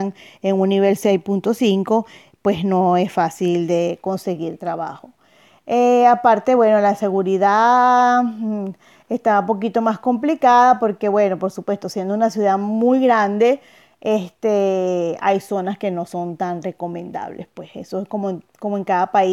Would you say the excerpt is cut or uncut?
uncut